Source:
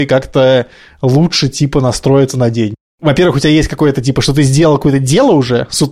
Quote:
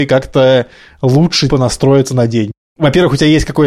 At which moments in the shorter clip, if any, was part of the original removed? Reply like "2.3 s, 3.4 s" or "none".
1.5 s

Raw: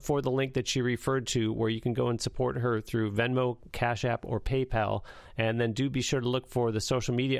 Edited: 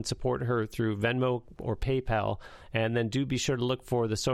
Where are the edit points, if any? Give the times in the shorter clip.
1.6 s

